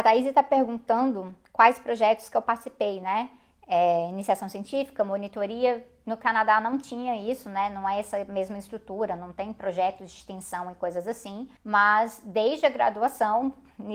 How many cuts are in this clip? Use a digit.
1